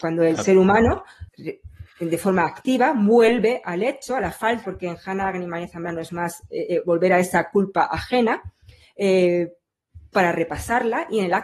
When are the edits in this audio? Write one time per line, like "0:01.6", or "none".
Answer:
0:01.3
0:04.6